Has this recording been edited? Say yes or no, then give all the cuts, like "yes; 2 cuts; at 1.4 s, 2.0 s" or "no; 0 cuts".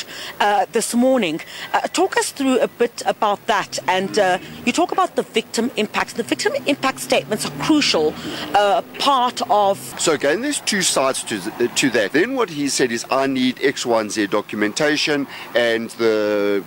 yes; 3 cuts; at 9.9 s, 12.1 s, 15.5 s